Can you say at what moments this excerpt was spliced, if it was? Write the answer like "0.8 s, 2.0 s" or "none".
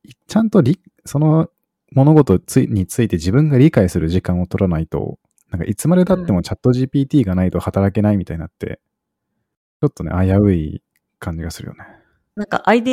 none